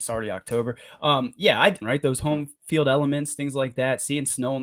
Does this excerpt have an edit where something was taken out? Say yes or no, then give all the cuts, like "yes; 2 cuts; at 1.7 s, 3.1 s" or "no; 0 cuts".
yes; 1 cut; at 1.8 s